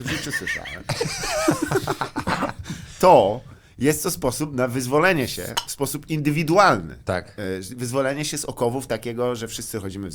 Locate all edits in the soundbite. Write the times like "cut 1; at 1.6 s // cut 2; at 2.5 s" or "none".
none